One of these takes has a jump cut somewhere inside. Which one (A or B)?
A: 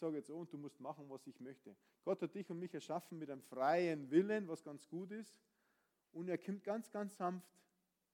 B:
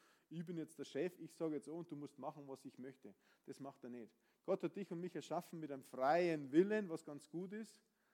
A